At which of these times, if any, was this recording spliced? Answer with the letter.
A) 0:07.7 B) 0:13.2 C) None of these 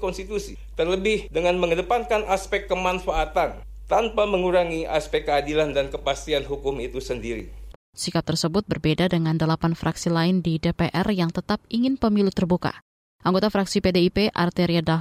A